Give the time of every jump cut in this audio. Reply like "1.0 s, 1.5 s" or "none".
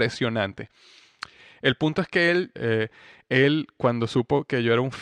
2.6 s